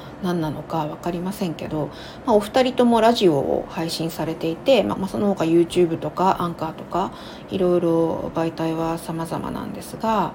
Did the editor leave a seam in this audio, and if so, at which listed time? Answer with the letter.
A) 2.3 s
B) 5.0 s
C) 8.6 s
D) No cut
B